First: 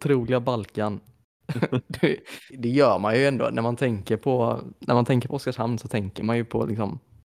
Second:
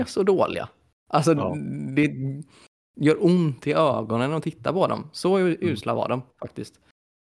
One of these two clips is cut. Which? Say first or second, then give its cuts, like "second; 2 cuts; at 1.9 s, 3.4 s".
first; 1 cut; at 2.5 s